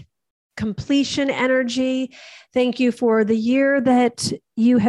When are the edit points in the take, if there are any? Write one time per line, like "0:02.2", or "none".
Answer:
none